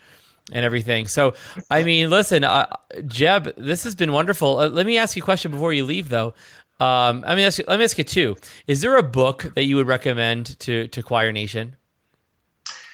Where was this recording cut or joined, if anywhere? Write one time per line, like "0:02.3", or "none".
none